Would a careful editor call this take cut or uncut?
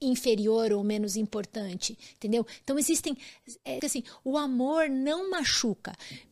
cut